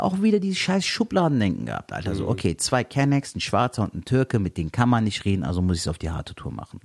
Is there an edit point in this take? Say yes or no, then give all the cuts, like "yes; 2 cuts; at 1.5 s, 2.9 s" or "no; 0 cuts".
no; 0 cuts